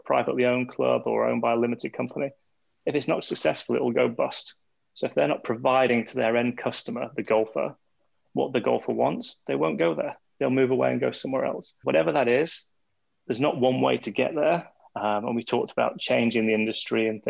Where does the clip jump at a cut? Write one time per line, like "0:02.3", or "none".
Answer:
0:11.8
0:14.8